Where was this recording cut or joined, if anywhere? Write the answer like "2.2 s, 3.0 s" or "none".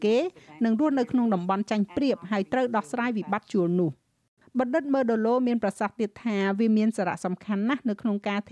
none